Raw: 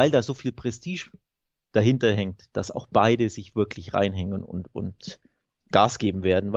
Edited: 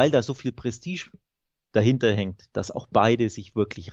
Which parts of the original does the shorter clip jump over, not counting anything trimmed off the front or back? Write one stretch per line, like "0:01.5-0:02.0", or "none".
none

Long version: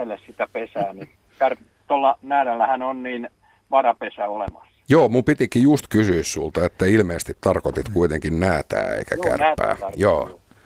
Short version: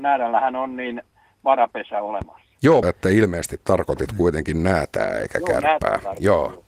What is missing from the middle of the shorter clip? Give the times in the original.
0:05.1-0:06.6

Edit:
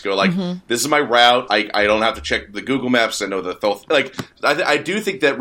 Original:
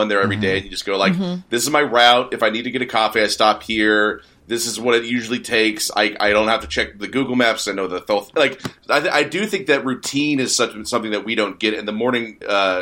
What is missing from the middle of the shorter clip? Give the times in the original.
0:02.3-0:05.9

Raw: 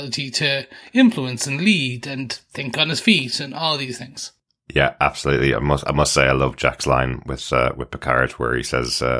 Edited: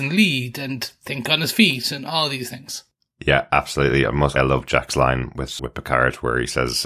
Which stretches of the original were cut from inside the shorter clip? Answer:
0:05.8-0:06.3
0:07.5-0:07.8

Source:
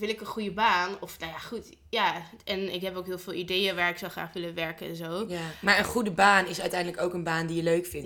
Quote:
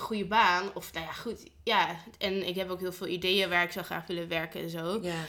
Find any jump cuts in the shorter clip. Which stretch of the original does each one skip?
none

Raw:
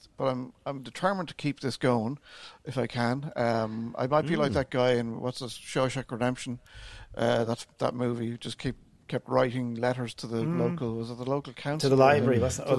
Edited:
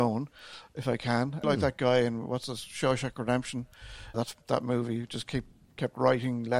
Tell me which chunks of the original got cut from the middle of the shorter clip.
0:03.3-0:04.4
0:07.1-0:07.5

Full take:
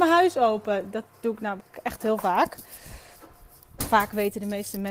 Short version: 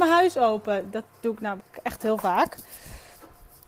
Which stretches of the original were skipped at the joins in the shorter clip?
none

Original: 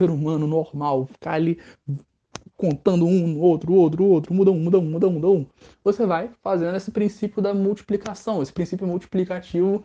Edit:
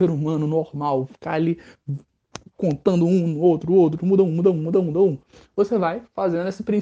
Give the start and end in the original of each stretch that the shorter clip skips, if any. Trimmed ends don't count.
0:04.0-0:04.3

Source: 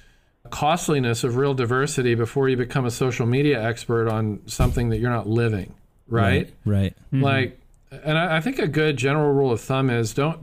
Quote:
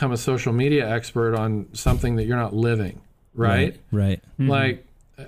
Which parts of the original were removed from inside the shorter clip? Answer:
none

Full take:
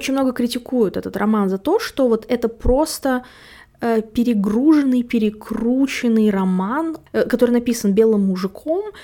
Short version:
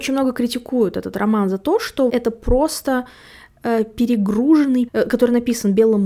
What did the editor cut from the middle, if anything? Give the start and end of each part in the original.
0:02.1-0:02.3
0:05.0-0:07.1

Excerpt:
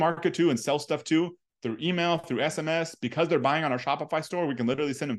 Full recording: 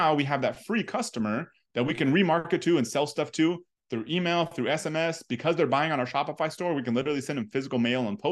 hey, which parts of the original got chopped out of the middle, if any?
none

